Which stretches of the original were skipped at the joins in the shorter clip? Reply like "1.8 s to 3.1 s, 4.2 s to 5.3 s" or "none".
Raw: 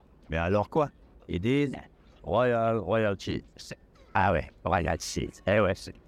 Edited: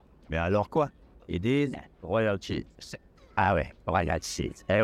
2.0 s to 2.8 s

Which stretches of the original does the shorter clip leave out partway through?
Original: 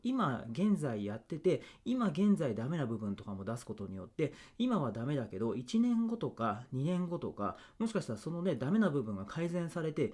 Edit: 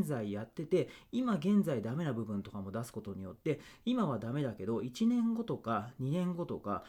none

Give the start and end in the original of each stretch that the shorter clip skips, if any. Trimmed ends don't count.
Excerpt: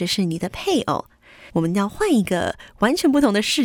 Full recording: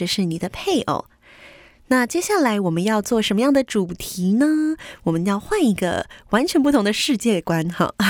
1.5 s to 5.0 s

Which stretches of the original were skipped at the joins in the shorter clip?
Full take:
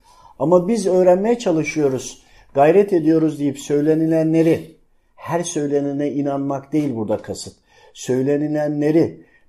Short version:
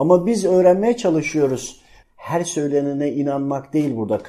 2.4 s to 5.0 s

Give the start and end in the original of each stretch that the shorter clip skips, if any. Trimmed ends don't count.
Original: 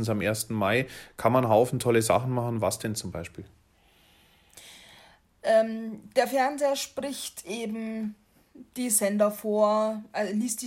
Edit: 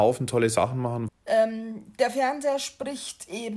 2.6 s to 5.3 s

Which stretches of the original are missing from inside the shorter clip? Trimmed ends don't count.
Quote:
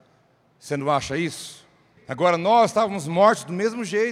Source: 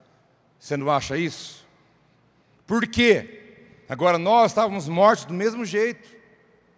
2.0 s to 3.8 s

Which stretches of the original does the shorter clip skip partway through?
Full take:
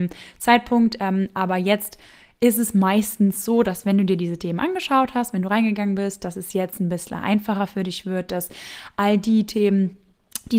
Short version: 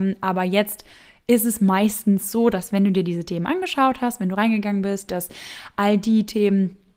6.2 s to 8.3 s

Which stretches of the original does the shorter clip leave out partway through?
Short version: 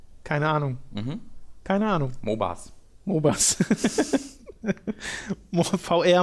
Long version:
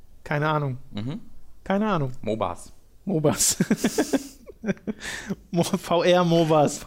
none

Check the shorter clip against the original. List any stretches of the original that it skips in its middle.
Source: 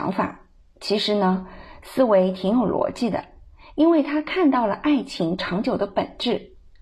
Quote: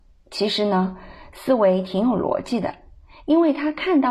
none

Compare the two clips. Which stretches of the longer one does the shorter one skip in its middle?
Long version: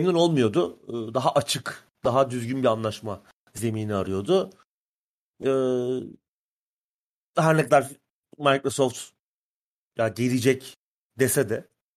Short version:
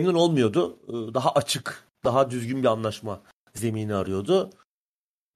none

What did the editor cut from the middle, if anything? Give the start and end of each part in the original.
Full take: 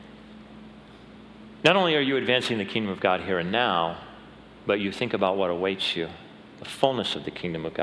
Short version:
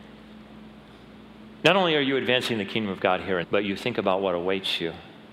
3.4 s to 4.6 s

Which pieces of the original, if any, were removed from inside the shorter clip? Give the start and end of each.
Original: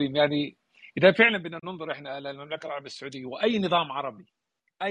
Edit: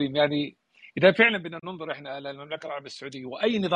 none

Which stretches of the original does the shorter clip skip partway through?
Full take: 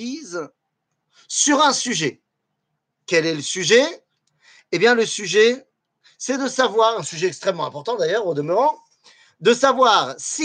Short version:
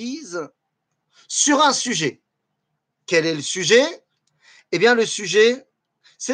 none

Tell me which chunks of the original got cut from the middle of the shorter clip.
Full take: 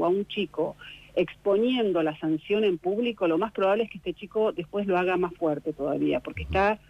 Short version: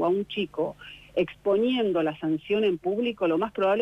none

